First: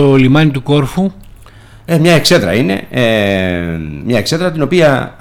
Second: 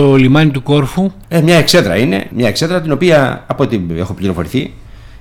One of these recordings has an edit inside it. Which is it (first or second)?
second